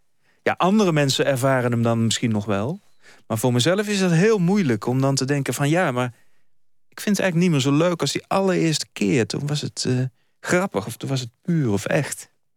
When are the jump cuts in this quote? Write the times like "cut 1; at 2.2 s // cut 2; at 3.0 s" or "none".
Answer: none